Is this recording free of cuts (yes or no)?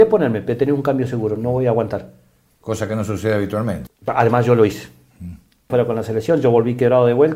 no